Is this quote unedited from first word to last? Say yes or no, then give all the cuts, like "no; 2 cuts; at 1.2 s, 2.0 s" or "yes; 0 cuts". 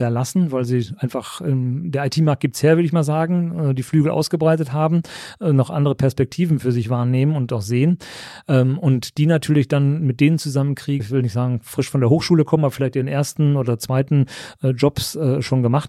no; 2 cuts; at 8.4 s, 11.0 s